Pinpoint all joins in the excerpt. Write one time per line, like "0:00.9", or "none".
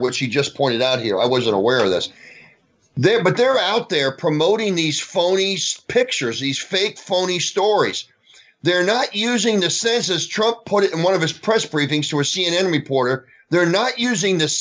none